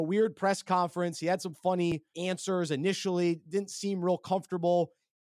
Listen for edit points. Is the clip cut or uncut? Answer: cut